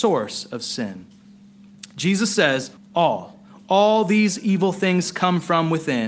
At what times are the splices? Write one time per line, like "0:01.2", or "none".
0:02.8